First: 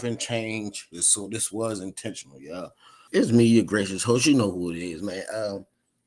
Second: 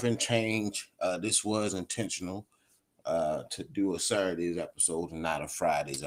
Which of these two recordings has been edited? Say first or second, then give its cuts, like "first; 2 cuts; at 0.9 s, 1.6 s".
first; 2 cuts; at 0.9 s, 3.1 s